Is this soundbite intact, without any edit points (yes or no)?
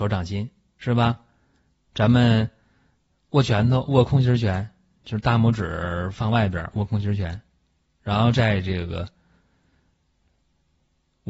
yes